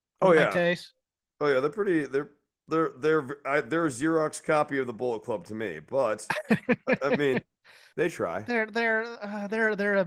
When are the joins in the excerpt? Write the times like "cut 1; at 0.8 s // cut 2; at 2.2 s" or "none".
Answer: cut 1; at 7.9 s